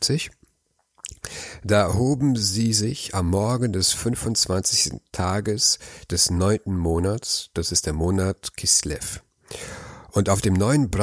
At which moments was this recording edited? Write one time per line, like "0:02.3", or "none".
none